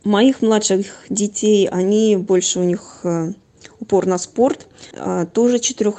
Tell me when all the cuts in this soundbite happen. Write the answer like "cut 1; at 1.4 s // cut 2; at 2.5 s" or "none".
cut 1; at 4.9 s

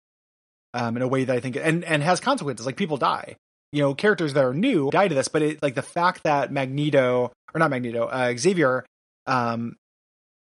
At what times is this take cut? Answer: cut 1; at 4.9 s

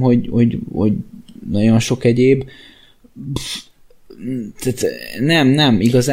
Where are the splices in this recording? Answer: none

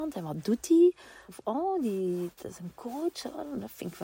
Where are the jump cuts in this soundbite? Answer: cut 1; at 1.3 s

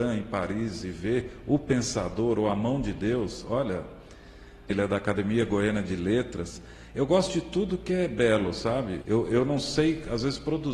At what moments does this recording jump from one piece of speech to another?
cut 1; at 4.7 s // cut 2; at 9.0 s

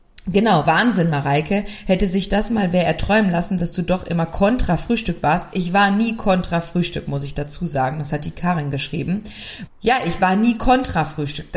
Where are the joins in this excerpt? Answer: cut 1; at 9.7 s

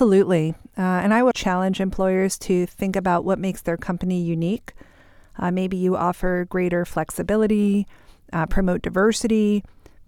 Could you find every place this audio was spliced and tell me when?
cut 1; at 1.3 s

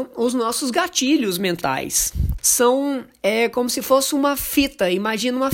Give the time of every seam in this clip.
cut 1; at 2.4 s

